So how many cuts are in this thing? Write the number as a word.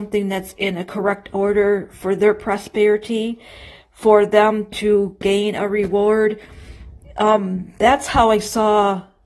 one